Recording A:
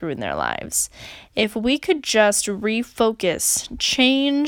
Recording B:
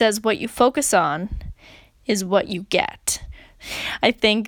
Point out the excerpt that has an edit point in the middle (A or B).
B